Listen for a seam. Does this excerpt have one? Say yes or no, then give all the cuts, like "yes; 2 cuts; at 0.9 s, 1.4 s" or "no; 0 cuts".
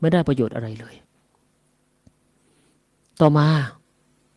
no; 0 cuts